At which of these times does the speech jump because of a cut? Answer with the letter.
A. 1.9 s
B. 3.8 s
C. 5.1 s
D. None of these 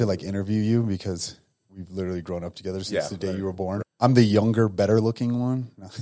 B